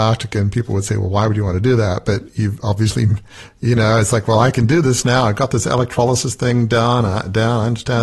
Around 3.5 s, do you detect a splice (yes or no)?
no